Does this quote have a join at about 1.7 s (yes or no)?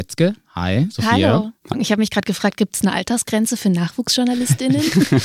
yes